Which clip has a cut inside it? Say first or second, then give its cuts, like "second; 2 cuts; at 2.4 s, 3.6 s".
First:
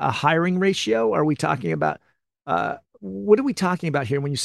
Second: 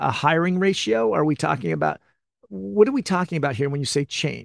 second; 1 cut; at 2.4 s